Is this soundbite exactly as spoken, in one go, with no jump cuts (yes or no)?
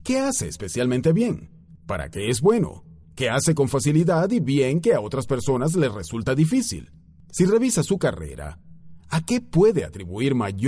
yes